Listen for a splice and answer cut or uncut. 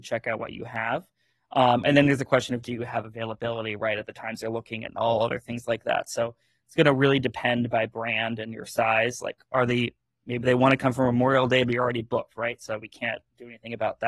uncut